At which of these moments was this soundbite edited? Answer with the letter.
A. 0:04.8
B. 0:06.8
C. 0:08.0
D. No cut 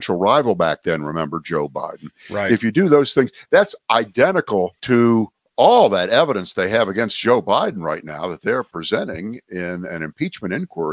A